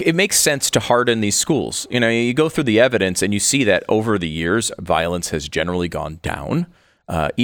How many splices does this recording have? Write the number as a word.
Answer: zero